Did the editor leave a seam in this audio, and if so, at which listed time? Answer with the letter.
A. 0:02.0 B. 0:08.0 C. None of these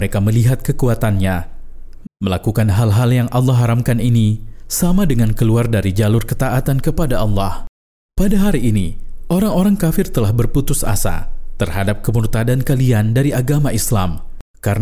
A